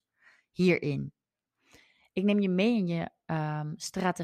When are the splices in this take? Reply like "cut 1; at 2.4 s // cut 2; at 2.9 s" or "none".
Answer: none